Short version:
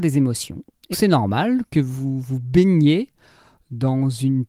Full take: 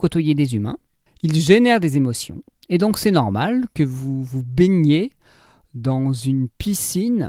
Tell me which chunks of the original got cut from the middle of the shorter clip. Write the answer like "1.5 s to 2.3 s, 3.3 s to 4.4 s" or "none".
2.7 s to 2.9 s